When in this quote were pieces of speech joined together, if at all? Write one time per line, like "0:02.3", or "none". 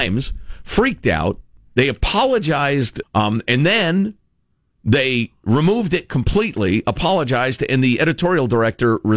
0:03.0